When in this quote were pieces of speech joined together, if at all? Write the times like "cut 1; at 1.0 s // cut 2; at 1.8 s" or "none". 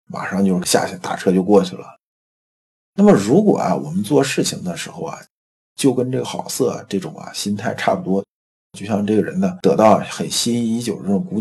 cut 1; at 6.2 s